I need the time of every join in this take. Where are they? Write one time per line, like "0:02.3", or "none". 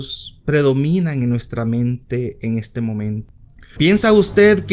0:03.8

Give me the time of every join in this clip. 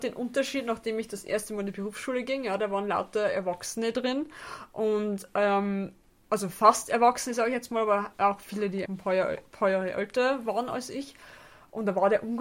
0:08.9

